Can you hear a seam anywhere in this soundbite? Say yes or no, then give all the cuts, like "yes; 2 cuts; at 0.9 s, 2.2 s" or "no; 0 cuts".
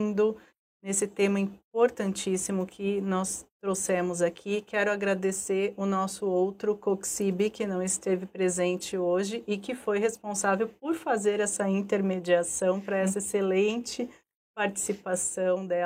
no; 0 cuts